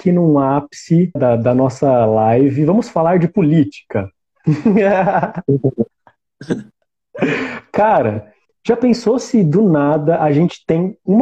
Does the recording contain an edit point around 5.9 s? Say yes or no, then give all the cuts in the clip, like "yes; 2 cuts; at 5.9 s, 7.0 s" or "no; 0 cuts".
no; 1 cut; at 1.2 s